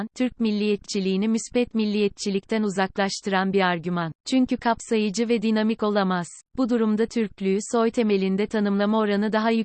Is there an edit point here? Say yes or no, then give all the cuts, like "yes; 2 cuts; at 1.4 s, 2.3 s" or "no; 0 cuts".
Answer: yes; 2 cuts; at 4.2 s, 6.5 s